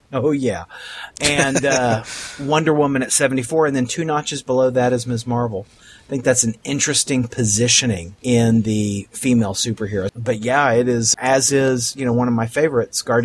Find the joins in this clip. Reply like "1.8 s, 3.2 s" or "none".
10.1 s, 11.1 s